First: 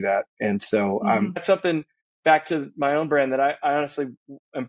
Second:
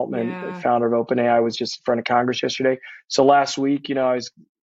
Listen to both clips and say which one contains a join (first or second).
first